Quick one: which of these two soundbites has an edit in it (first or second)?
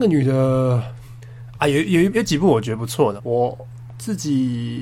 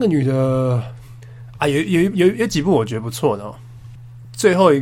first